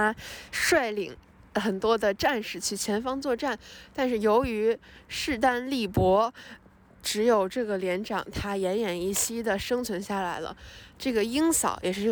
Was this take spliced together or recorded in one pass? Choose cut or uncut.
uncut